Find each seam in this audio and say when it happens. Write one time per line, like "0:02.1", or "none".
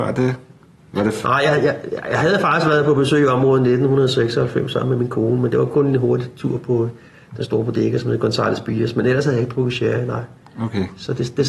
none